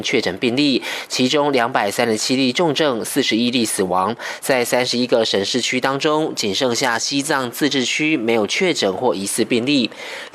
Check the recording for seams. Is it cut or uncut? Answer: uncut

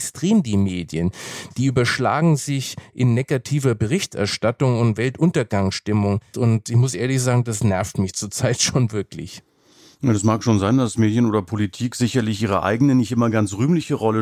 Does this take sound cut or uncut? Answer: cut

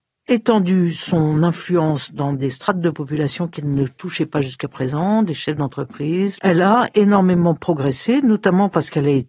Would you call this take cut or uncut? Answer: cut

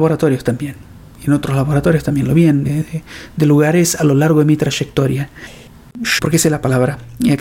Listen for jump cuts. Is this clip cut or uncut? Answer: cut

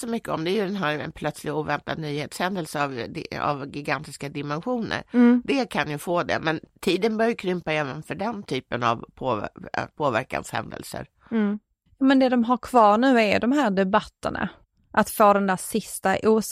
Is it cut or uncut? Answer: uncut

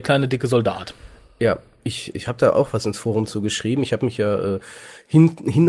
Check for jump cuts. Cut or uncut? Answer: uncut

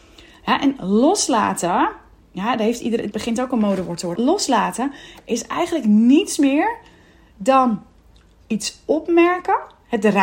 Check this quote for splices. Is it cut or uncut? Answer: cut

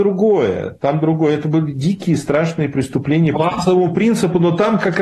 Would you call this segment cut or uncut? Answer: cut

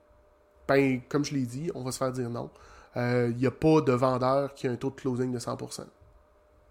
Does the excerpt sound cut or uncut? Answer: uncut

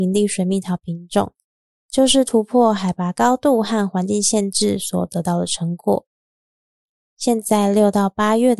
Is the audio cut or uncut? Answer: cut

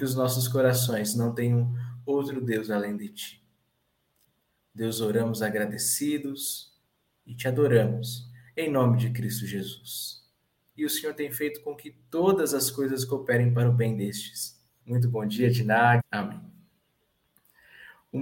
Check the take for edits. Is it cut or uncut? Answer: cut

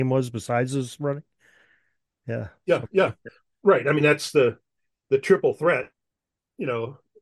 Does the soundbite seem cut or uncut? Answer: uncut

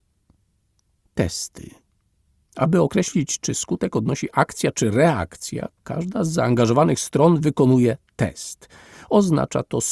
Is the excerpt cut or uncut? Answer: uncut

